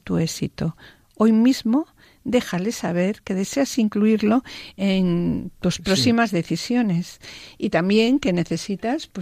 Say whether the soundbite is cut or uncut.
uncut